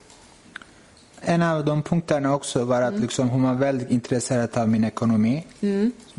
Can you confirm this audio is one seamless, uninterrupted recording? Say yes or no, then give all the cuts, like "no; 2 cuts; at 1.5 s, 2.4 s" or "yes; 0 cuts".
no; 1 cut; at 1.2 s